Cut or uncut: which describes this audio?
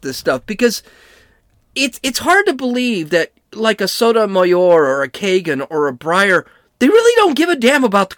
uncut